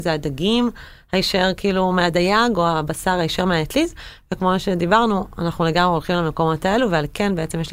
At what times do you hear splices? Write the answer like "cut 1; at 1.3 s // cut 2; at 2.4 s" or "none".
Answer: none